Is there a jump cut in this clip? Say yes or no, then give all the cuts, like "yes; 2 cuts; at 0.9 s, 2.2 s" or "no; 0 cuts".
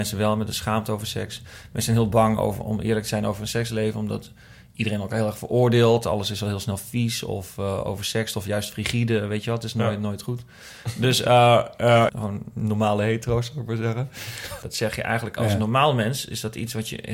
yes; 2 cuts; at 12.1 s, 14.6 s